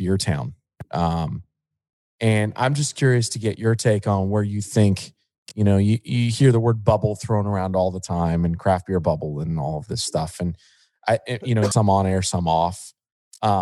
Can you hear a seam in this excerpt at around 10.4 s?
no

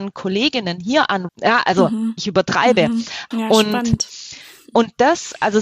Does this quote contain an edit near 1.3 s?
yes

